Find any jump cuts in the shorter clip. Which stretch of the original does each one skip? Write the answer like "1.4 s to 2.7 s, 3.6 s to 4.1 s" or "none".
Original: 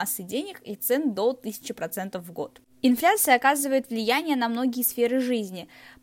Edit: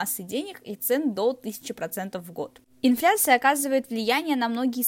none